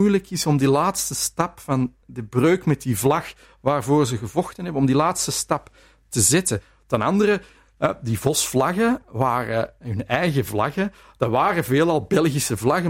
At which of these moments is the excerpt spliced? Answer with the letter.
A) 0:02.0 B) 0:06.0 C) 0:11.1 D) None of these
A